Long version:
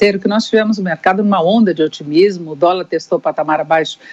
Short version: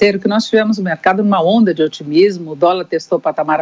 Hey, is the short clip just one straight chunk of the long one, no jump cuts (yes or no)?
yes